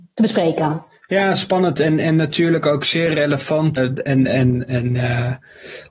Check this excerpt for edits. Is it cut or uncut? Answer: cut